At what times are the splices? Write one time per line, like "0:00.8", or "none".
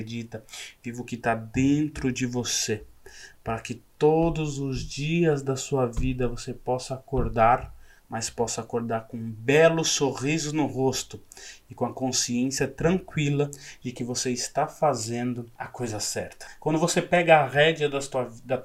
0:08.0